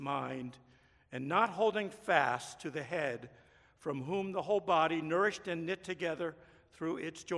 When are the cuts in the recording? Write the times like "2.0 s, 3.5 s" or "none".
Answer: none